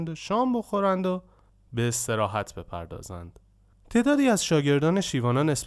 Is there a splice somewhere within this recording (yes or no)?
no